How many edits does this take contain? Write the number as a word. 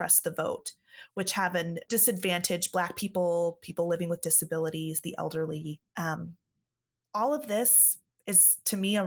one